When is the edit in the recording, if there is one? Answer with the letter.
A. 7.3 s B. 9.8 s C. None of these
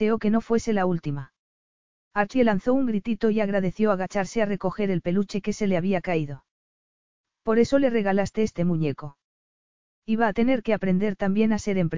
B